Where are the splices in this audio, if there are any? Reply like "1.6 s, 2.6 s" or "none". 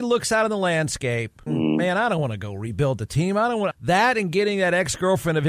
1.5 s, 3.7 s